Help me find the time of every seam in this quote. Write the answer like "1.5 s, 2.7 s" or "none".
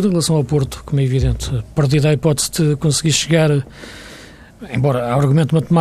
none